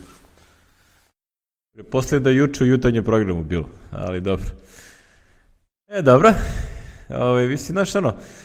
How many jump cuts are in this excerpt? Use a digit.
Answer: 0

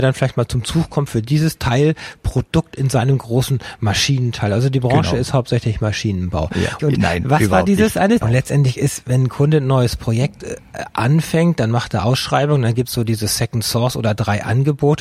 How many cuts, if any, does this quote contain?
2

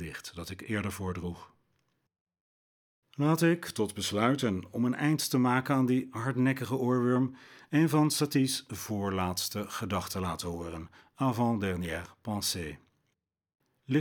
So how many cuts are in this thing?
0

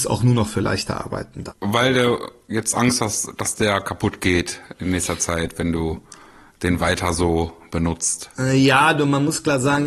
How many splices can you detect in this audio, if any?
1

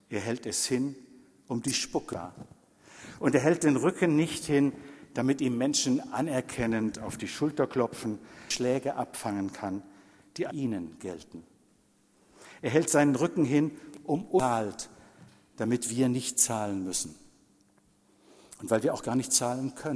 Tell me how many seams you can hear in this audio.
1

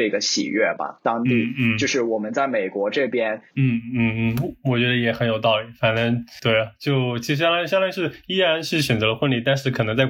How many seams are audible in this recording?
1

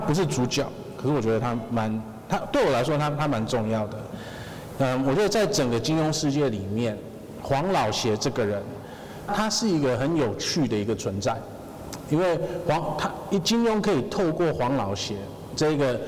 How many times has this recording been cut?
1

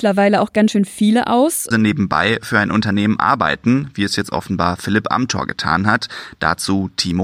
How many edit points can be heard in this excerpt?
1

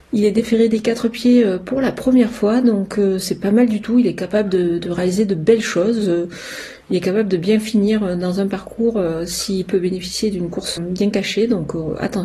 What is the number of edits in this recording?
1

